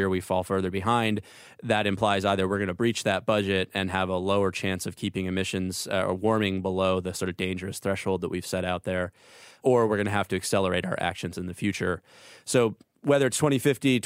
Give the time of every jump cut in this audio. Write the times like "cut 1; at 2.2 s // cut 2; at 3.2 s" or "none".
cut 1; at 9.6 s